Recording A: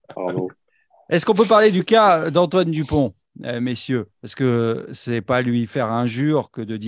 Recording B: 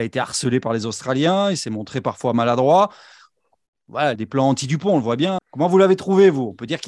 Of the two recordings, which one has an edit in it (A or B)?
B